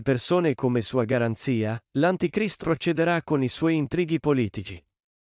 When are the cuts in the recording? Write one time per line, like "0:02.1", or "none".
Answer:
0:02.6